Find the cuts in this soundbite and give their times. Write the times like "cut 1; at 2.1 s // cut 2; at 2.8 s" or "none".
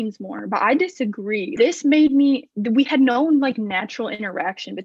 cut 1; at 1.6 s